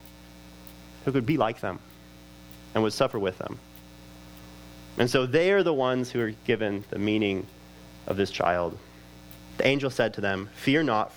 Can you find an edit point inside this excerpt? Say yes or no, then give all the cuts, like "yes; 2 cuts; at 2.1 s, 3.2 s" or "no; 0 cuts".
yes; 1 cut; at 9.5 s